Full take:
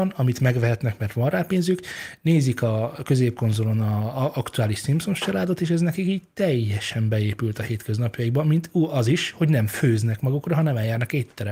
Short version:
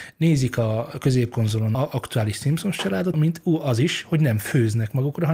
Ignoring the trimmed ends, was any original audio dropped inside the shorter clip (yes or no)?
yes